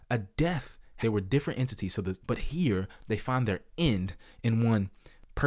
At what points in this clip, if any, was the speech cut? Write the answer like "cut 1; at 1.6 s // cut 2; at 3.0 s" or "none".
cut 1; at 1.0 s // cut 2; at 2.2 s